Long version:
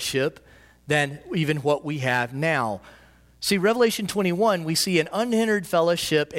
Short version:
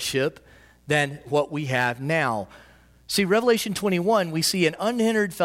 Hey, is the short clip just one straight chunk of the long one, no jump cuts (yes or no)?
no